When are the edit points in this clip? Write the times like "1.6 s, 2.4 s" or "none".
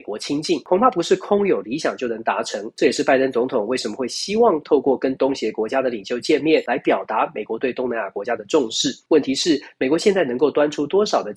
none